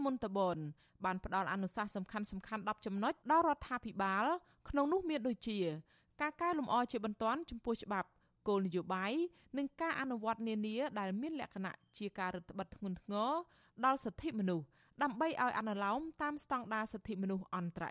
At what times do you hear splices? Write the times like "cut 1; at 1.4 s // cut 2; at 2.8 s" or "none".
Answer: cut 1; at 3.2 s

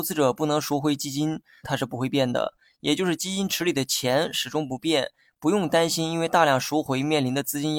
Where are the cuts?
cut 1; at 1.6 s

